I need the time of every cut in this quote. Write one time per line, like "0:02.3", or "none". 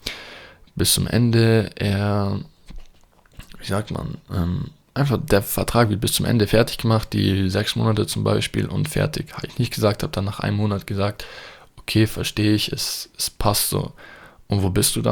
none